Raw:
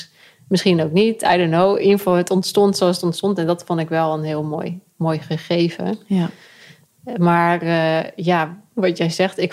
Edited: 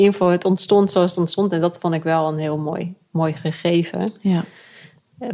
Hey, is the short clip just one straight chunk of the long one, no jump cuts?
yes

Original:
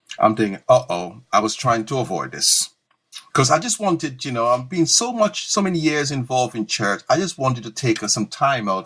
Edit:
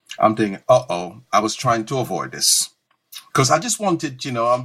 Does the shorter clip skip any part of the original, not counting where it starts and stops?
no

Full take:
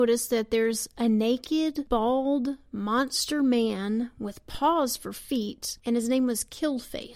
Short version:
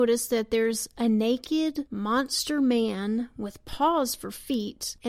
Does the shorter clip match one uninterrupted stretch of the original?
no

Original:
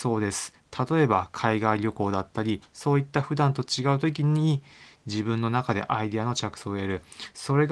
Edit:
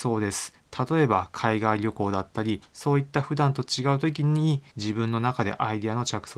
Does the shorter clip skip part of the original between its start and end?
yes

